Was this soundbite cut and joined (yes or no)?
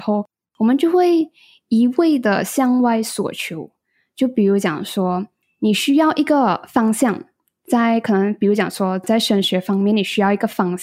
no